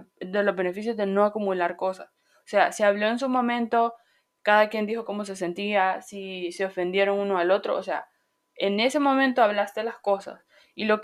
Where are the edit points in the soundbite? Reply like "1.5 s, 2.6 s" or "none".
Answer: none